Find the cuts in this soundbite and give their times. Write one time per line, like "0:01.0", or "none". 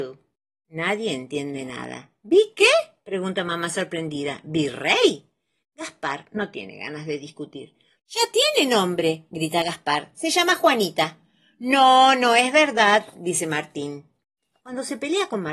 0:07.9
0:14.6